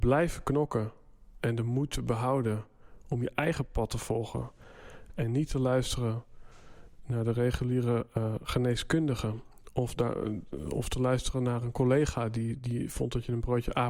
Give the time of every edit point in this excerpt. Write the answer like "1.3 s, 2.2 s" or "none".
none